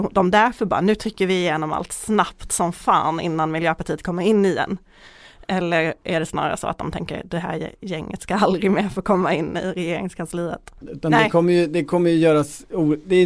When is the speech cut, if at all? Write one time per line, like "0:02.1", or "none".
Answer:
0:10.8